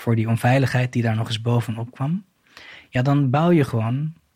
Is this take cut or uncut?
uncut